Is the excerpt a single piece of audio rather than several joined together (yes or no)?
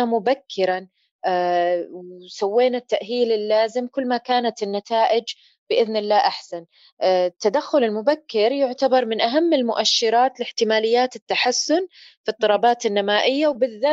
yes